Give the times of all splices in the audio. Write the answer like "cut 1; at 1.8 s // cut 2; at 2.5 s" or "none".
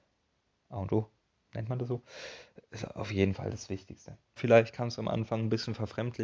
cut 1; at 4.4 s